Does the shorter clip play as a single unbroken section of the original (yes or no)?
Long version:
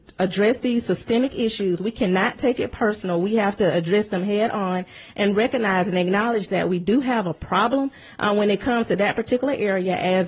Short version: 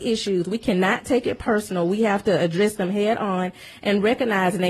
yes